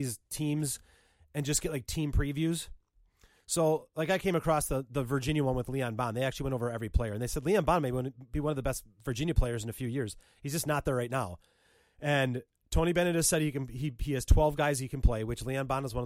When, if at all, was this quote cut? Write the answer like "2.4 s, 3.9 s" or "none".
none